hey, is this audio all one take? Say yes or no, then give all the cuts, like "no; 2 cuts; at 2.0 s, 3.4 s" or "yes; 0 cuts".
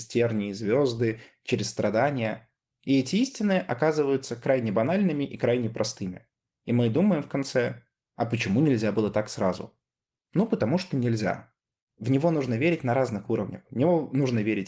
no; 1 cut; at 11.9 s